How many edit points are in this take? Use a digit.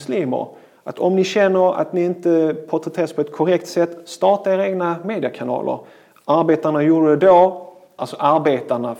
1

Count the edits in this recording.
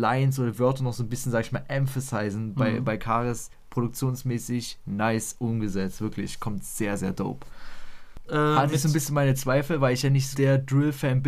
2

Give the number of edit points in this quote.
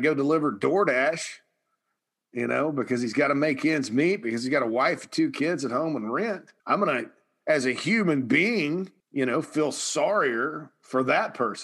2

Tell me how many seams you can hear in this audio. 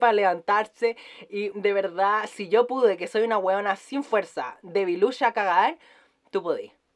1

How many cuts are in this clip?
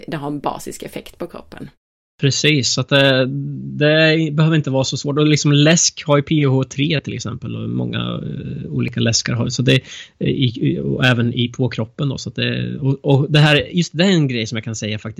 0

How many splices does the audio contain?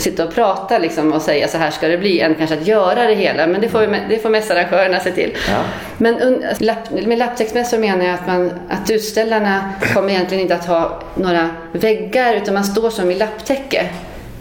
1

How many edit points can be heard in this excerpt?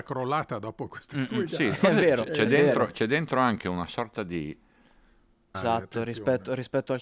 1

